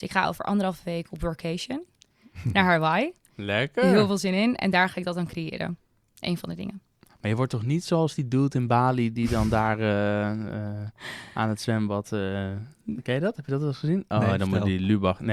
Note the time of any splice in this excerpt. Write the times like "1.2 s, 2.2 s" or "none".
none